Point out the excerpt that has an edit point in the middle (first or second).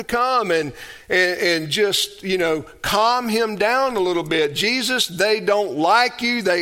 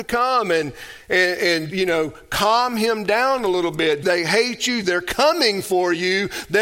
second